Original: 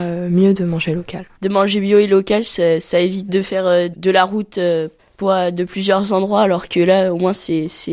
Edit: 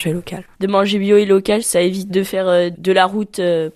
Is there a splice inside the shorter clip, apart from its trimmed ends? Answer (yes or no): yes